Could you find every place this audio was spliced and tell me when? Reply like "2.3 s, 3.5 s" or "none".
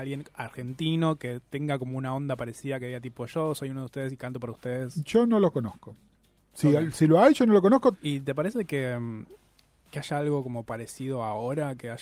7.9 s